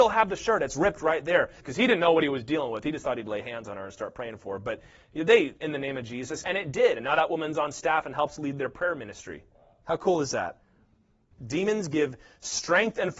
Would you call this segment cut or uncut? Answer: cut